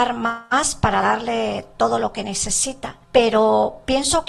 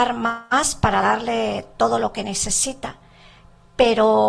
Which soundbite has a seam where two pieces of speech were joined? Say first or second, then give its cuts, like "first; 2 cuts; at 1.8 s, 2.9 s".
first; 1 cut; at 3.0 s